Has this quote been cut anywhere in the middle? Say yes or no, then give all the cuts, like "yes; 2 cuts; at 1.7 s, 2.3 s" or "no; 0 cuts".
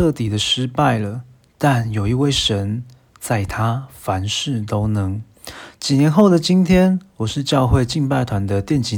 yes; 1 cut; at 5.7 s